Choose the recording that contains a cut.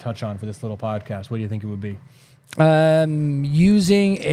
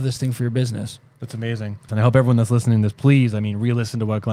second; 1 cut; at 1.9 s

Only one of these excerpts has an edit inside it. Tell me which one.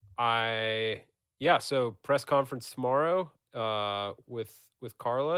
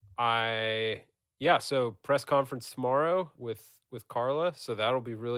second; 1 cut; at 3.3 s

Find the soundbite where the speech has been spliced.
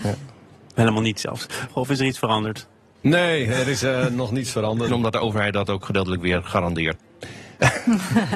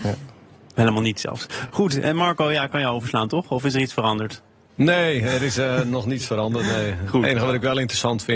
first; 3 cuts; at 1.7 s, 4.9 s, 7.0 s

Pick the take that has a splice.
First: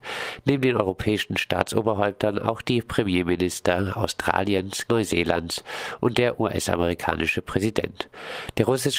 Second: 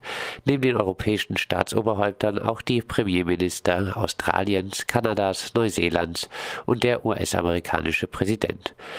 first; 1 cut; at 4.9 s

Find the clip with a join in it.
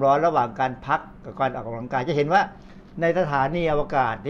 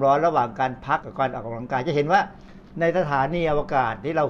second; 1 cut; at 1.0 s

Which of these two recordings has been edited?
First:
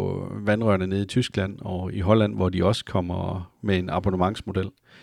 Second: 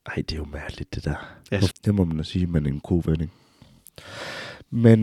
second; 2 cuts; at 1.7 s, 2.8 s

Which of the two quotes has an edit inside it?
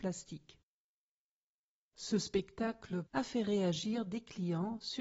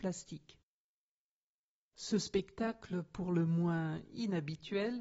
first; 1 cut; at 3.1 s

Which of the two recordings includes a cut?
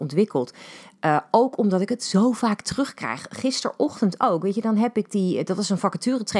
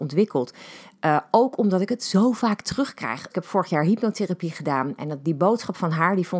second; 2 cuts; at 3.3 s, 5.0 s

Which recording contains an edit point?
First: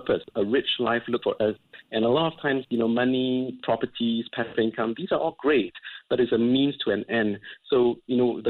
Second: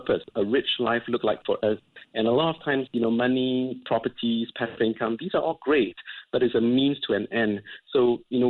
first; 1 cut; at 1.2 s

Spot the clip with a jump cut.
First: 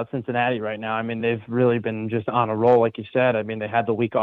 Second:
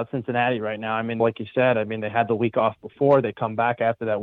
second; 1 cut; at 1.2 s

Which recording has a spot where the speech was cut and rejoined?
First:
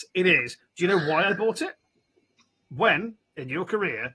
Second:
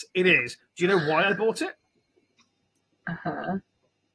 first; 1 cut; at 2.7 s

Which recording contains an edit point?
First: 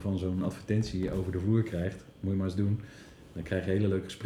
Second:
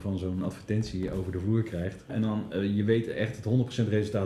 second; 1 cut; at 2.1 s

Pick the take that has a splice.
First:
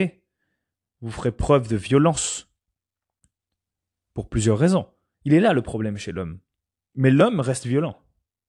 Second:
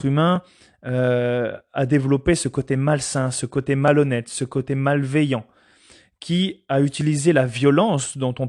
first; 1 cut; at 5.1 s

